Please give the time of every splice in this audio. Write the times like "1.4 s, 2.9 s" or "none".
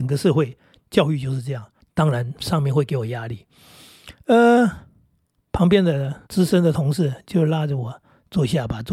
1.8 s, 6.3 s